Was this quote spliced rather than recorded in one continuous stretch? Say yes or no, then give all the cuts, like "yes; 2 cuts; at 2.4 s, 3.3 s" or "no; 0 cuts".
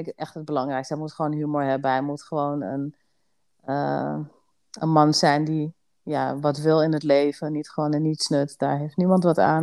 no; 0 cuts